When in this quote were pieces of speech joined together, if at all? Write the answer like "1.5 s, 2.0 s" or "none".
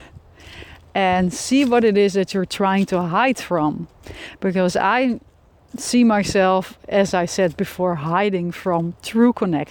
none